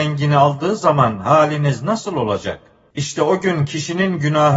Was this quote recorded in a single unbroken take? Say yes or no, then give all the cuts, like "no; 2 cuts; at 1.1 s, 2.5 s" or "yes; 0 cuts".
no; 1 cut; at 2.9 s